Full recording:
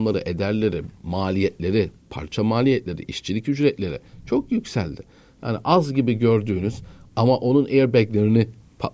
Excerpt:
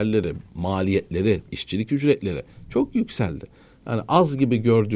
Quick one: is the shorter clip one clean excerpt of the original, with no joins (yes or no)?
no